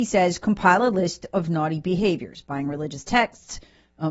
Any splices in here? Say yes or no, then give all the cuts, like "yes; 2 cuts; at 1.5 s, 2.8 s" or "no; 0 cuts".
no; 0 cuts